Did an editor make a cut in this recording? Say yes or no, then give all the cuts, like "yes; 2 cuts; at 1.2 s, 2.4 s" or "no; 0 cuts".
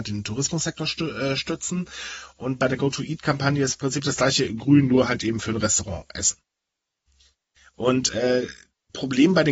no; 0 cuts